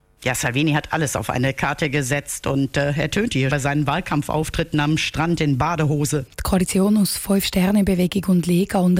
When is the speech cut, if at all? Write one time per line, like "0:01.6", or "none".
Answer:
0:03.5
0:06.3